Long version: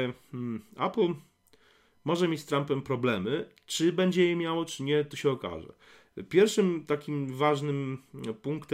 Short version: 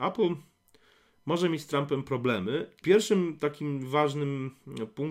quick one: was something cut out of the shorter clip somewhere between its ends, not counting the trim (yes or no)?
yes